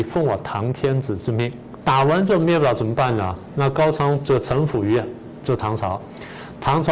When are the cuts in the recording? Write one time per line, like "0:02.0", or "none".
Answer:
0:01.8